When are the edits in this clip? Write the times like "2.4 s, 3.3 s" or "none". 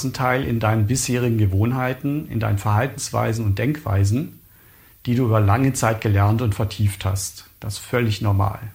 none